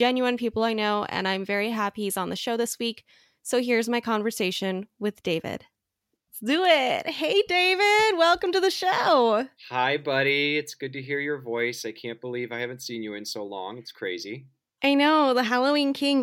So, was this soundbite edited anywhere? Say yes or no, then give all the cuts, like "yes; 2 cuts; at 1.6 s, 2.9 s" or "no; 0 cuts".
no; 0 cuts